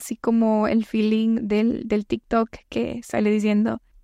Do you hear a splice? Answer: no; 0 cuts

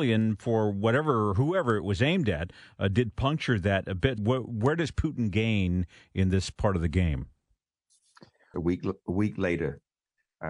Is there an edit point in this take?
yes; 2 cuts; at 4.2 s, 8.5 s

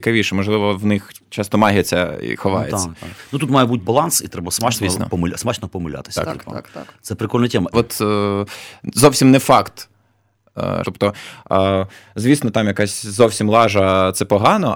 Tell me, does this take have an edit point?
yes; 2 cuts; at 7.7 s, 10.8 s

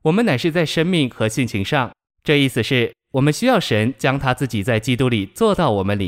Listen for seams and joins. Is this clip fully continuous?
no; 1 cut; at 2.1 s

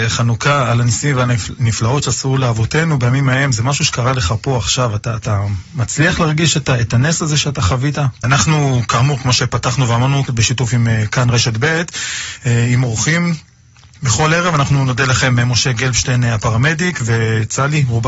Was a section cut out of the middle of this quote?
yes; 2 cuts; at 8.2 s, 10.3 s

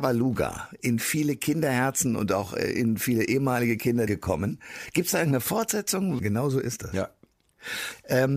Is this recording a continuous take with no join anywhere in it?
no; 2 cuts; at 4.1 s, 6.2 s

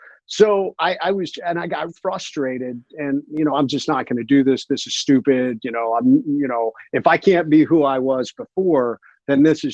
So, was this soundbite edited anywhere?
yes; 2 cuts; at 1.9 s, 3.5 s

